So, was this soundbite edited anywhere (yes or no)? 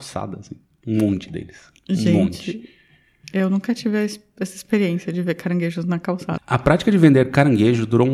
yes